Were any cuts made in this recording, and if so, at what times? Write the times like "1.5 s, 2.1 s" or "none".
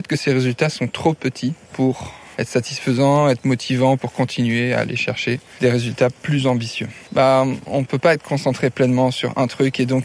2.3 s, 7.1 s